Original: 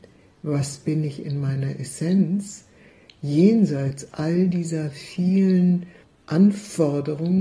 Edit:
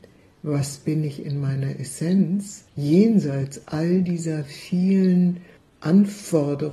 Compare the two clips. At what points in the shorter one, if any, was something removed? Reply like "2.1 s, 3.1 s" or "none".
2.7 s